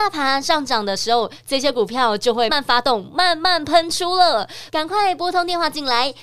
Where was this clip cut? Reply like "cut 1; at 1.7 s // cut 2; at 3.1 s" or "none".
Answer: cut 1; at 2.5 s // cut 2; at 4.7 s